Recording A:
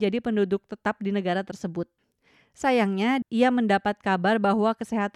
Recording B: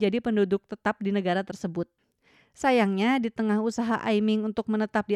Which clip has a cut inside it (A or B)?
A